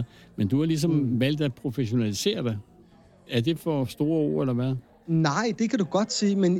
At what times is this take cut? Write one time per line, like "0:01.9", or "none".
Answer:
0:05.6